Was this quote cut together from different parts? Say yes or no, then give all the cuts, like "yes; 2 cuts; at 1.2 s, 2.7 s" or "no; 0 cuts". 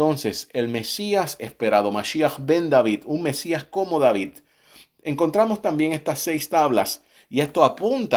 no; 0 cuts